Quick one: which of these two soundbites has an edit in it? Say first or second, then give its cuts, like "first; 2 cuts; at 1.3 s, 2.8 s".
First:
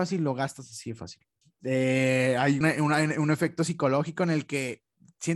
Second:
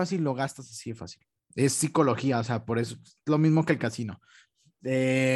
first; 2 cuts; at 1.4 s, 2.6 s